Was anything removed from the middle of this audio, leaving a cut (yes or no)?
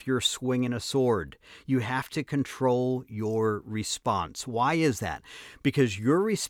no